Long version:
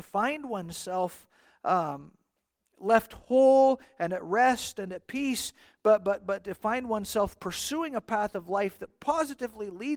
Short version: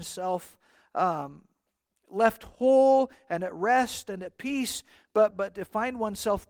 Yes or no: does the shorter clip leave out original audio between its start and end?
yes